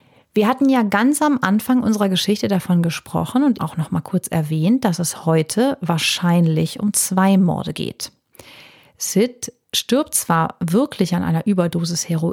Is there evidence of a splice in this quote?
yes; 1 cut; at 3.6 s

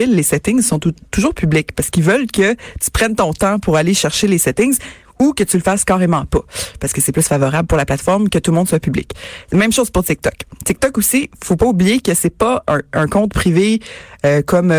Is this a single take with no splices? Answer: yes; 0 cuts

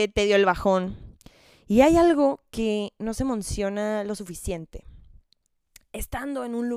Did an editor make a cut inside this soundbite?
no; 0 cuts

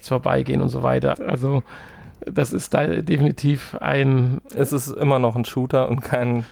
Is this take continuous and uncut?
no; 1 cut; at 1.1 s

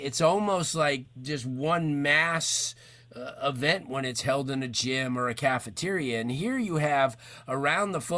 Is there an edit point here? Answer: no; 0 cuts

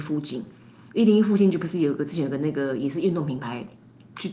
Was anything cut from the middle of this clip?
no; 0 cuts

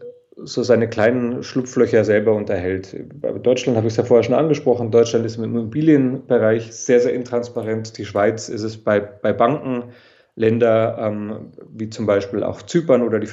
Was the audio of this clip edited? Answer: no; 0 cuts

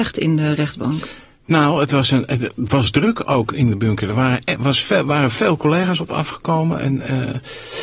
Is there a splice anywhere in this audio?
no; 0 cuts

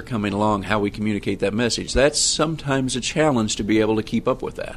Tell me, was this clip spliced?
no; 0 cuts

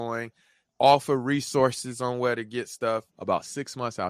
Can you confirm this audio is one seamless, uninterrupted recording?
no; 1 cut; at 3.1 s

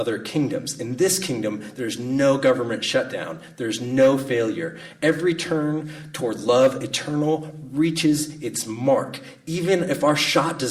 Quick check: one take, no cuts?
yes; 0 cuts

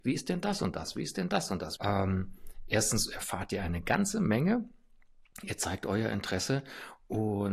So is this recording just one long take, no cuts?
no; 1 cut; at 1.8 s

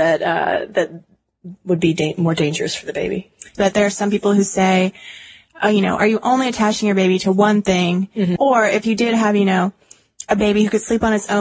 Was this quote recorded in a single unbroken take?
no; 2 cuts; at 3.5 s, 8.4 s

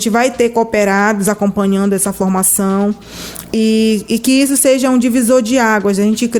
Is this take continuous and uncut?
yes; 0 cuts

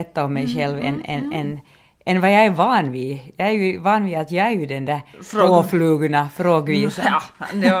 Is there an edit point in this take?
no; 0 cuts

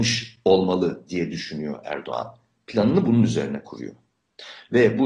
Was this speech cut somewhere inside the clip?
no; 0 cuts

